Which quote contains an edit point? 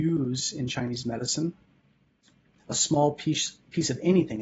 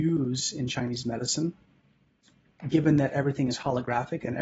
first; 1 cut; at 2.5 s

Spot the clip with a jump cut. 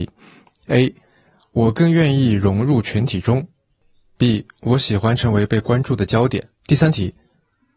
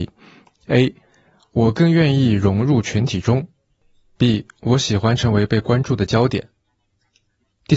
first; 1 cut; at 6.6 s

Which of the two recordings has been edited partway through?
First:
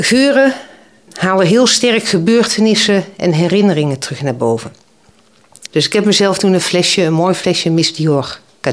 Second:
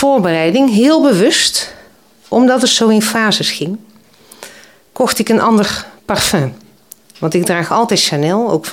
first; 2 cuts; at 1.1 s, 5.7 s

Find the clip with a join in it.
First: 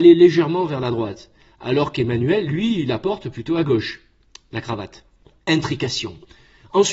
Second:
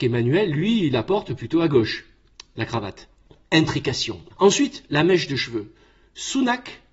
second; 1 cut; at 4.3 s

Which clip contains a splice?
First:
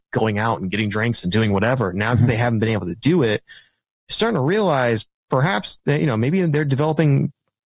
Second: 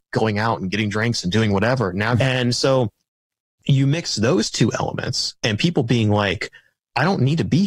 second; 1 cut; at 2.2 s

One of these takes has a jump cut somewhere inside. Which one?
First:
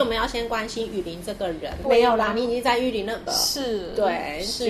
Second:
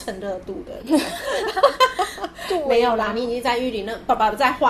first; 2 cuts; at 1.8 s, 3.3 s

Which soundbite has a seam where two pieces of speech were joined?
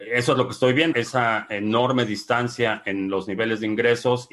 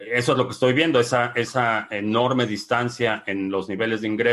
first; 1 cut; at 0.9 s

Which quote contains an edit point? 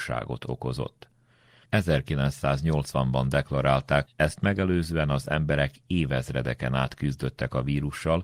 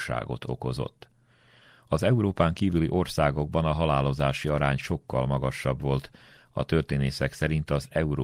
first; 2 cuts; at 1.6 s, 4.1 s

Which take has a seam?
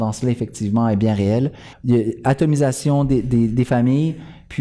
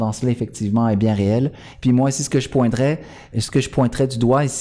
first; 1 cut; at 1.7 s

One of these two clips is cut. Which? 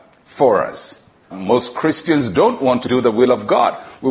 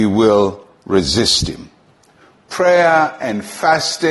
first; 1 cut; at 1.3 s

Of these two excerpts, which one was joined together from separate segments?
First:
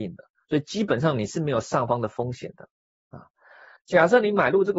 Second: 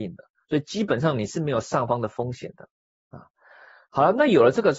first; 1 cut; at 3.8 s

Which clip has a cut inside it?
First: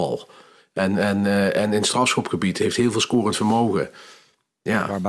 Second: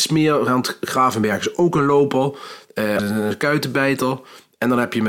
second; 1 cut; at 3.0 s

